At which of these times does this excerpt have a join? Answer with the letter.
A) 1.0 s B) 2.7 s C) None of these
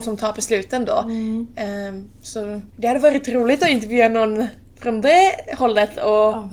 B